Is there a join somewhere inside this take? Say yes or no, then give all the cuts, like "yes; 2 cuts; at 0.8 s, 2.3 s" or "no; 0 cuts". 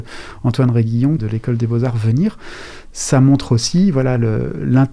yes; 1 cut; at 1.2 s